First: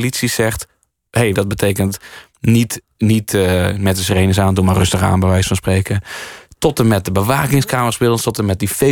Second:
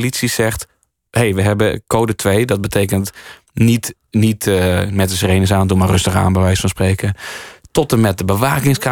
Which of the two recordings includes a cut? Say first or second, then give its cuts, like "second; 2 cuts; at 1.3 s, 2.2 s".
first; 1 cut; at 1.3 s